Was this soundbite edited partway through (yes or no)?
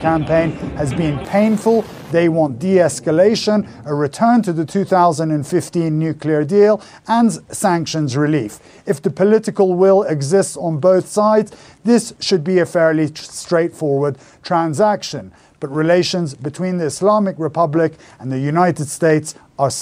no